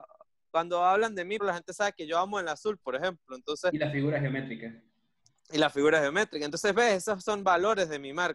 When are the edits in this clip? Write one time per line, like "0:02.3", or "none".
0:01.4
0:02.8